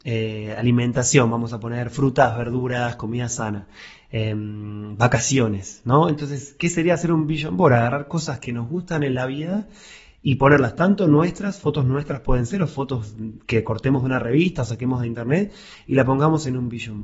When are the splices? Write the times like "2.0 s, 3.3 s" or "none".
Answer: none